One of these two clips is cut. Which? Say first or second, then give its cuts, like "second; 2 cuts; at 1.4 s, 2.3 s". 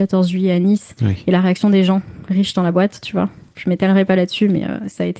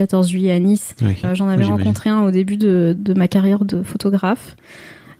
second; 2 cuts; at 1.2 s, 3.0 s